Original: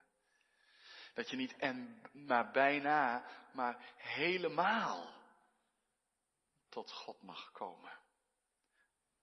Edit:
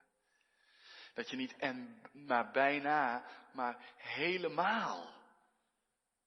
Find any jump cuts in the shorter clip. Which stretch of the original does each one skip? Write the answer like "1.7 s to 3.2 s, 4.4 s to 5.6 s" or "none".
none

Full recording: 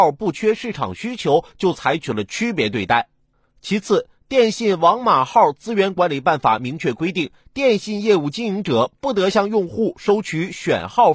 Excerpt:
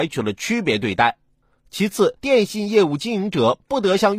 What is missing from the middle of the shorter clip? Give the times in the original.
4.1 s to 7.5 s

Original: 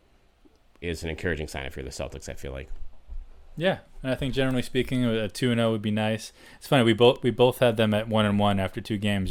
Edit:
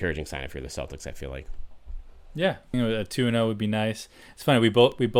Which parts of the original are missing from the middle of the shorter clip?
4.0 s to 5.0 s

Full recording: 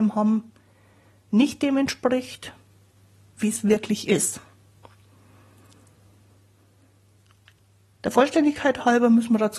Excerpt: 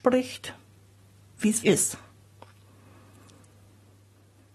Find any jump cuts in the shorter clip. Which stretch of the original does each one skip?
3.6 s to 4.0 s

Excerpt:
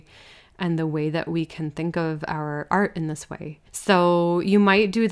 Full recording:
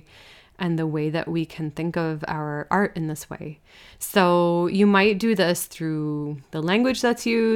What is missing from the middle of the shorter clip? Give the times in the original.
3.7 s to 3.9 s

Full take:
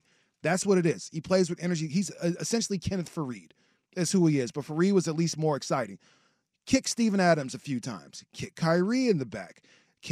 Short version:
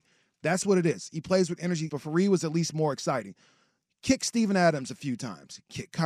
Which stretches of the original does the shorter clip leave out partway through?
1.9 s to 4.5 s

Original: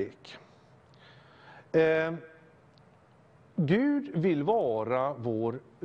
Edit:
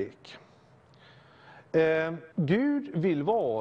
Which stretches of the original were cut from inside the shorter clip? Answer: 2.3 s to 3.5 s

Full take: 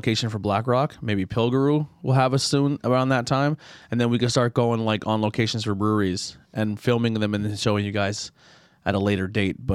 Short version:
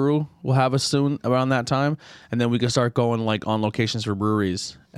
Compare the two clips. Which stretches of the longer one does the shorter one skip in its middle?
none

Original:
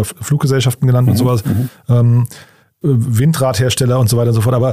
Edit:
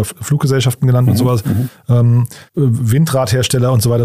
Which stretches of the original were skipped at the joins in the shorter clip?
2.5 s to 2.7 s

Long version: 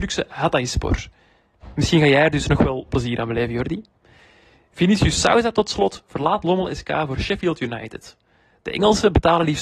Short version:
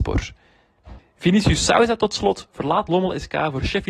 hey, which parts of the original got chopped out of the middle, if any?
1.7 s to 4.5 s

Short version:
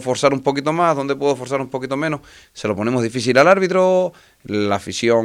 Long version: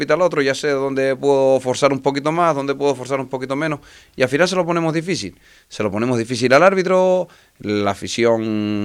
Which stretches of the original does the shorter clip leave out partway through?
4.0 s to 5.6 s

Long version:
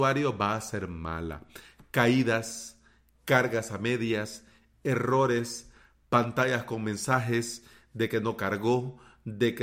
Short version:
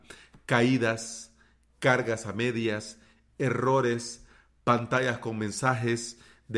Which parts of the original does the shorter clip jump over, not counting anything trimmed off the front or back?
none

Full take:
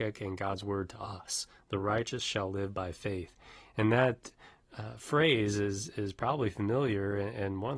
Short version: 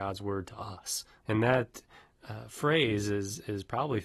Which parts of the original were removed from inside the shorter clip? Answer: 1.6 s to 3.7 s

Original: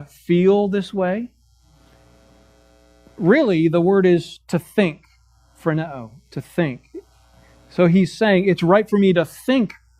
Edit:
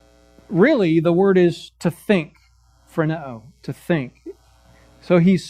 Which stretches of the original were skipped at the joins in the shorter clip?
none

